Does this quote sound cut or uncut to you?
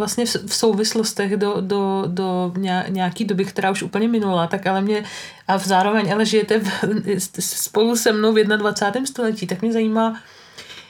uncut